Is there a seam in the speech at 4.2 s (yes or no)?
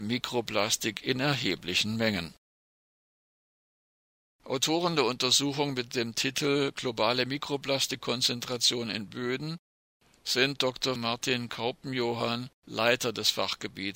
no